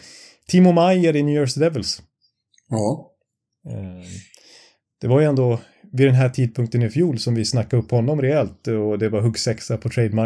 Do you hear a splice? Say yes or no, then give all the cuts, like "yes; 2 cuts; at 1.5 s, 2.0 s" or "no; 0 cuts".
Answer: no; 0 cuts